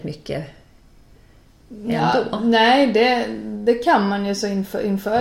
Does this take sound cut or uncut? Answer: uncut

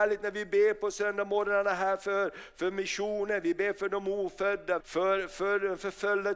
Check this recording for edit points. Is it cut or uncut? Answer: cut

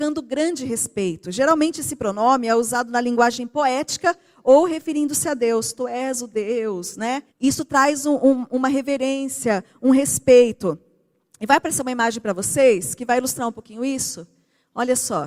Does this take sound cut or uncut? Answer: cut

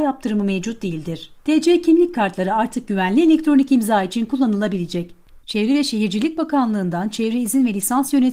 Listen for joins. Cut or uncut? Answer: cut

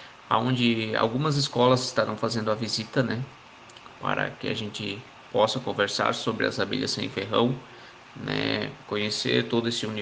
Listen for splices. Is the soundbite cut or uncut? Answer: uncut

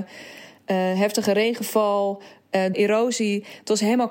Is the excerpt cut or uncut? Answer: cut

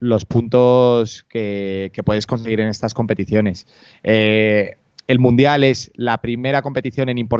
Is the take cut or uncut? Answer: uncut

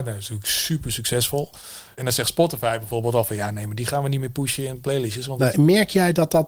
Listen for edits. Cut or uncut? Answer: cut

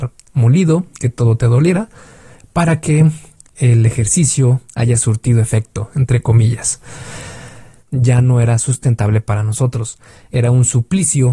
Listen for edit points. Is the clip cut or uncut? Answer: cut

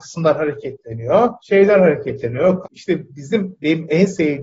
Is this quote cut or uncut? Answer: cut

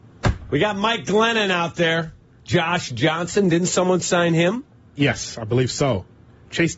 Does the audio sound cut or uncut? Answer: uncut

